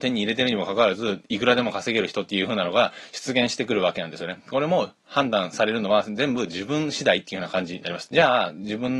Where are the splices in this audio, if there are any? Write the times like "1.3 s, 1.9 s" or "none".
8.1 s